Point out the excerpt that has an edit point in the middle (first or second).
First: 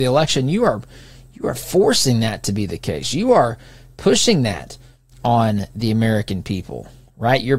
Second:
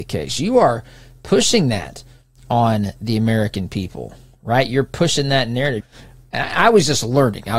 second